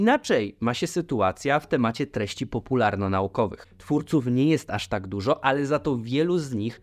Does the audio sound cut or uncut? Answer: cut